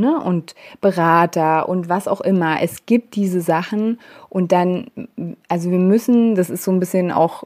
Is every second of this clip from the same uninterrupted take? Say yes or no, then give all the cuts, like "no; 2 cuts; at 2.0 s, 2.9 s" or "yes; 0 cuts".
yes; 0 cuts